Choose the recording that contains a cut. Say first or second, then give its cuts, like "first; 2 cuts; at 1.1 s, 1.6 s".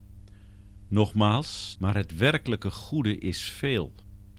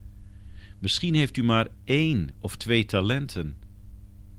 first; 1 cut; at 1.8 s